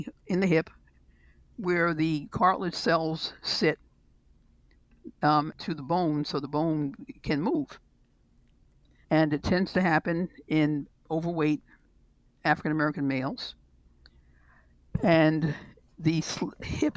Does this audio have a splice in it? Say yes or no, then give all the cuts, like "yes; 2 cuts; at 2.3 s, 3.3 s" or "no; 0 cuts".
yes; 2 cuts; at 5.5 s, 9.0 s